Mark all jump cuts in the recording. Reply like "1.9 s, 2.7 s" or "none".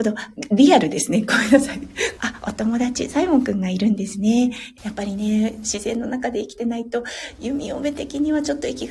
2.2 s, 4.8 s